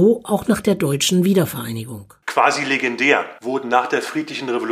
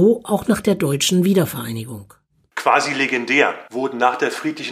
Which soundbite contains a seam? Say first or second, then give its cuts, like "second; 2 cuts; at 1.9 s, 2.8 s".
first; 1 cut; at 2.2 s